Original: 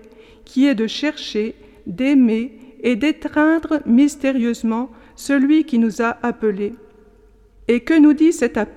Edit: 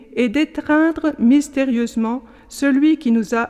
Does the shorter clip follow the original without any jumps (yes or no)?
yes